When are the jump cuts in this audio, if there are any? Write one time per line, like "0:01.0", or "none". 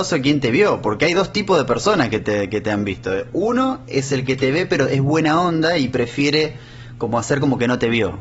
none